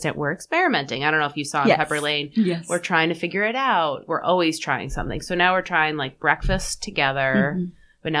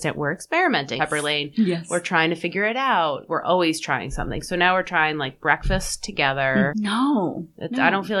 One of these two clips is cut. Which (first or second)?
second